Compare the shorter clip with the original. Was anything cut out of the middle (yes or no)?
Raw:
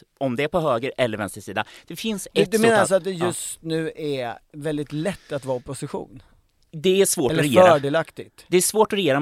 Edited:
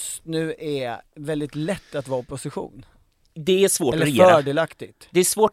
no